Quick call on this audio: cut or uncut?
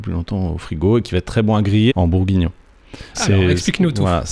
cut